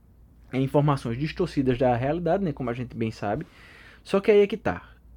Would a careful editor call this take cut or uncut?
uncut